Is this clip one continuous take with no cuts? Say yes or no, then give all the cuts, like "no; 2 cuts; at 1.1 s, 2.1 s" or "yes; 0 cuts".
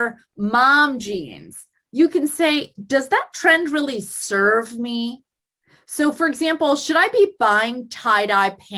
yes; 0 cuts